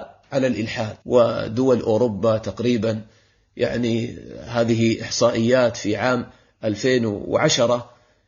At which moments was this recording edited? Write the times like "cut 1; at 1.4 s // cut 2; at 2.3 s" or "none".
cut 1; at 1.0 s